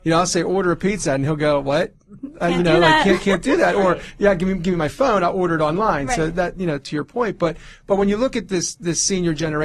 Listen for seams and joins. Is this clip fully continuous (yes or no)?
yes